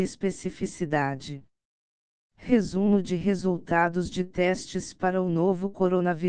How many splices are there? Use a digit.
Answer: 0